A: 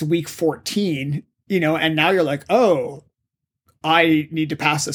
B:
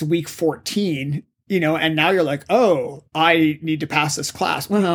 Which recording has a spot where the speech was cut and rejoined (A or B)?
B